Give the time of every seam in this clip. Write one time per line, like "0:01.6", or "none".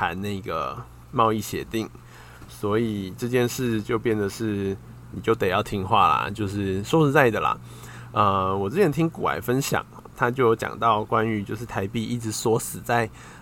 0:01.0